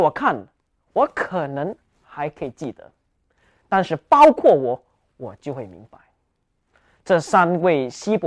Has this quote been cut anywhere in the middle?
no; 0 cuts

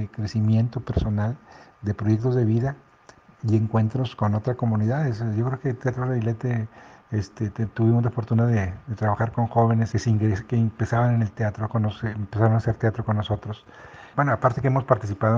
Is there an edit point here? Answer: yes; 3 cuts; at 9.9 s, 11.7 s, 14.1 s

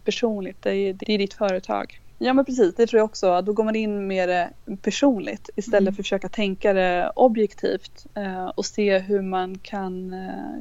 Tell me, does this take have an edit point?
yes; 2 cuts; at 1.0 s, 2.1 s

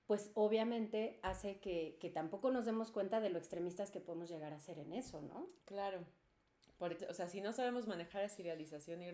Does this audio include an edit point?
yes; 2 cuts; at 5.6 s, 7.0 s

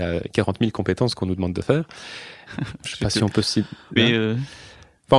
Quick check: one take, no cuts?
no; 2 cuts; at 2.5 s, 4.0 s

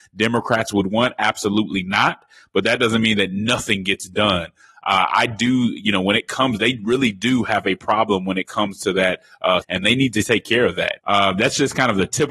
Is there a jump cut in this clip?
yes; 2 cuts; at 9.6 s, 11.0 s

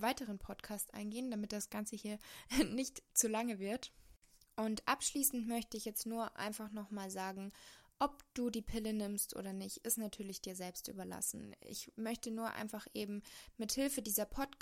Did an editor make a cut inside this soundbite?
no; 0 cuts

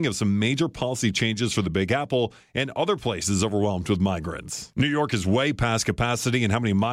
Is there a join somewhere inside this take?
yes; 1 cut; at 4.7 s

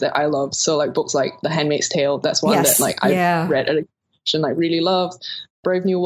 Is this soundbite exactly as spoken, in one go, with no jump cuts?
yes; 0 cuts

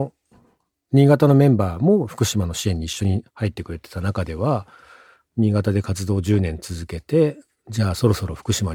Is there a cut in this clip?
no; 0 cuts

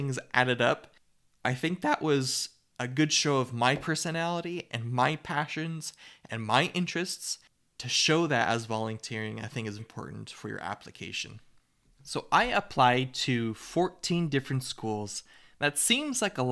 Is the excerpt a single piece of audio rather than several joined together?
no; 1 cut; at 9.8 s

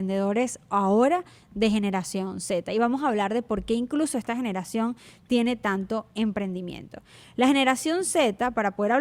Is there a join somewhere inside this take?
no; 0 cuts

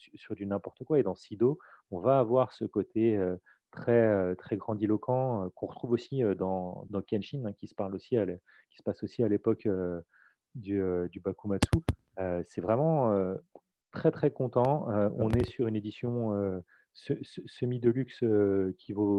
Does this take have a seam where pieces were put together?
yes; 1 cut; at 6.9 s

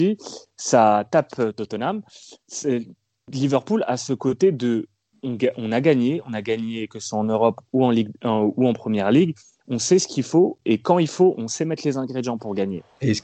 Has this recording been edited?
no; 0 cuts

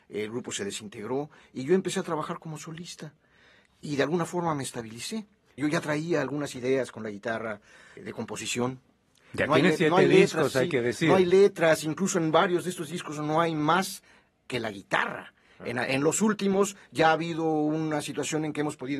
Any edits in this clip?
yes; 2 cuts; at 5.6 s, 8.0 s

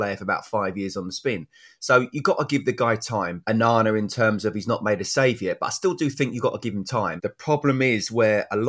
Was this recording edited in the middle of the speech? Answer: yes; 2 cuts; at 3.4 s, 7.2 s

